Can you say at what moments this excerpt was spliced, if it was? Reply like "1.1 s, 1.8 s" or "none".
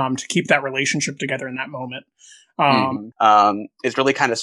3.1 s